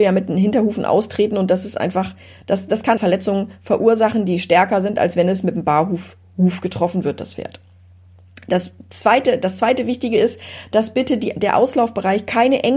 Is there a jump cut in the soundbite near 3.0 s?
yes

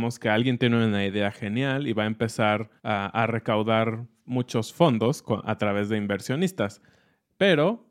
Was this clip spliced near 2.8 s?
yes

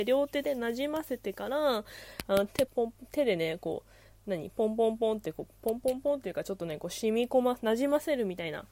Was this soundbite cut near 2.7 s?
yes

